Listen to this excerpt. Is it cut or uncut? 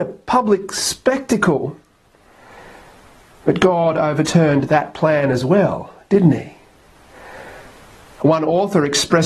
uncut